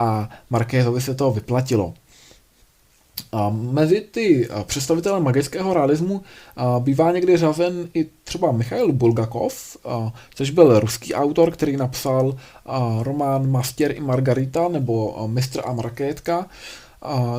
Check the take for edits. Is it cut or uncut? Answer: uncut